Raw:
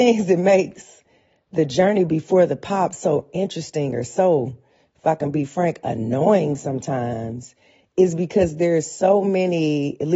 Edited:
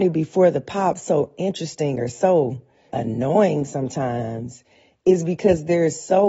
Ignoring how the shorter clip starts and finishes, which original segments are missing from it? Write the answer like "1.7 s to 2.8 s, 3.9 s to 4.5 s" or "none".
4.8 s to 5.8 s